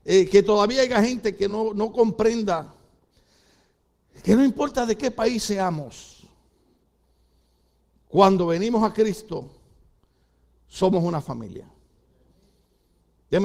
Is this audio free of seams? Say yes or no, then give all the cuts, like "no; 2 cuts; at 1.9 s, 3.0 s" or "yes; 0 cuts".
yes; 0 cuts